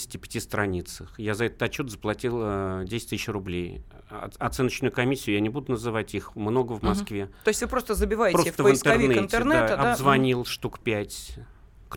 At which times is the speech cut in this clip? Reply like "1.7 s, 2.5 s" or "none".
none